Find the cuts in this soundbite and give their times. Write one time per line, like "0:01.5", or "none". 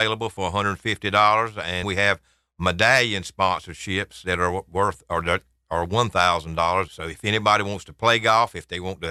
0:01.8
0:06.9